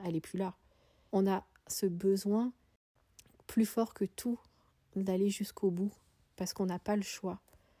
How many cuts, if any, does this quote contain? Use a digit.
1